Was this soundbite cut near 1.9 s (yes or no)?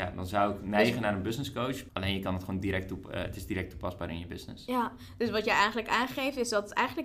yes